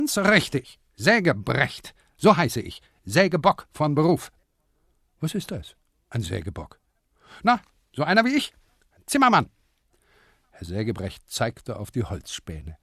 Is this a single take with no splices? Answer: yes; 0 cuts

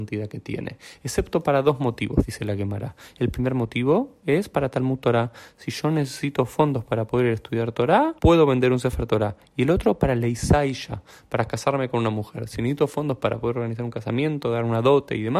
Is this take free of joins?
no; 1 cut; at 8.2 s

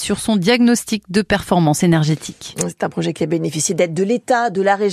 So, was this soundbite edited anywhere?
no; 0 cuts

